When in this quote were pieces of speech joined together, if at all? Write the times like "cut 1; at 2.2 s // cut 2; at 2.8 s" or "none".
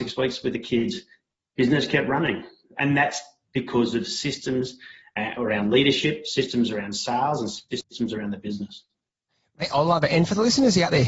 none